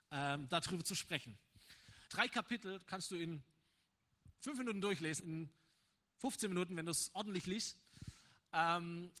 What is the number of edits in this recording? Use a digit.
2